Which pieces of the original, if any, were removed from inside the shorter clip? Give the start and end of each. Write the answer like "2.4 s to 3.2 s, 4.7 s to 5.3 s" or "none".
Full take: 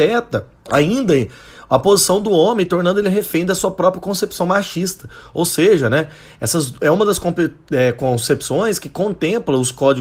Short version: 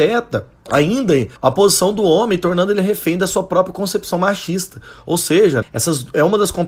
1.4 s to 1.6 s, 5.9 s to 6.3 s